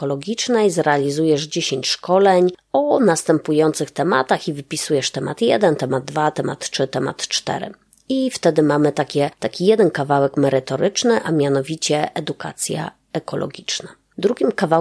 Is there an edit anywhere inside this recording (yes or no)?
no